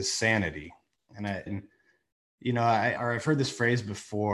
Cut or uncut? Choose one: cut